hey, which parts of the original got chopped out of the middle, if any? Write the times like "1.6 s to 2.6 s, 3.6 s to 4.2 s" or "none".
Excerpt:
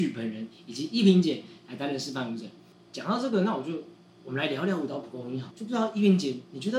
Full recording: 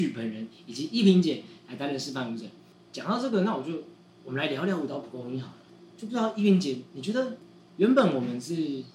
5.5 s to 5.9 s